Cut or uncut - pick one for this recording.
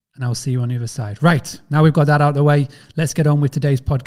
uncut